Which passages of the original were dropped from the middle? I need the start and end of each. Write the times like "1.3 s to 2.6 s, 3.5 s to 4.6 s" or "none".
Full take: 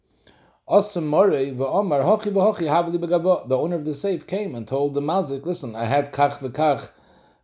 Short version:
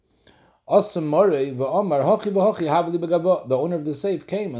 none